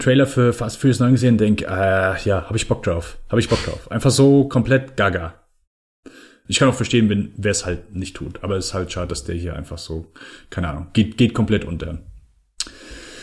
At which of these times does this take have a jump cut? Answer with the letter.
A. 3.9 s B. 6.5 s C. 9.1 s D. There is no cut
B